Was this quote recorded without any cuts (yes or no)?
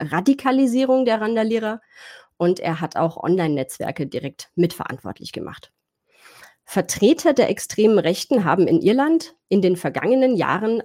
yes